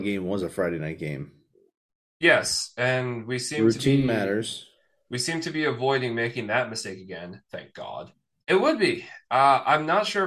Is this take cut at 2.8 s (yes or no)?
no